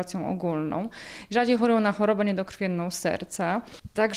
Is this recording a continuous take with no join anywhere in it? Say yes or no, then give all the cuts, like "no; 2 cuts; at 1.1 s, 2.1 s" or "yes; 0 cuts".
yes; 0 cuts